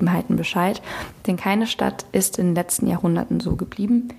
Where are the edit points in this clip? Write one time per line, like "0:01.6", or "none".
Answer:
none